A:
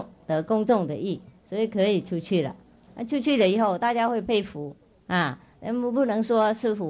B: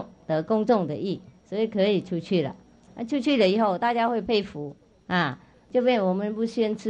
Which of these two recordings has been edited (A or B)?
B